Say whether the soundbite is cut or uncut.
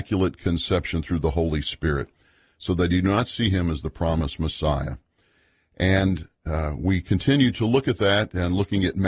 uncut